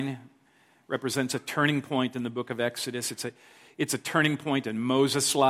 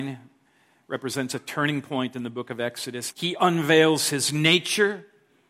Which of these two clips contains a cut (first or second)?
second